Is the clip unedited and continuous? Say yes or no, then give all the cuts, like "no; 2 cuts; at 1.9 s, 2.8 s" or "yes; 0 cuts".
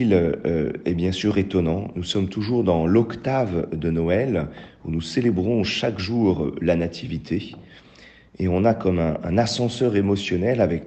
yes; 0 cuts